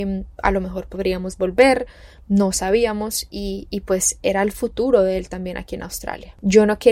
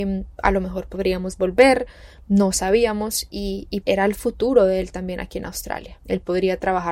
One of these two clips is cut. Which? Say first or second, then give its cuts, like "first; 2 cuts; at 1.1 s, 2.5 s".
second; 2 cuts; at 3.8 s, 6.0 s